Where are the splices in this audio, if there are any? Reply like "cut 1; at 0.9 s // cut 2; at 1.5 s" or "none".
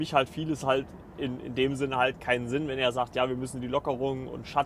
none